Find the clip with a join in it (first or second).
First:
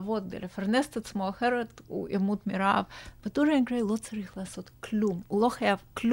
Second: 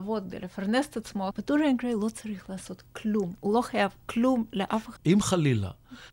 second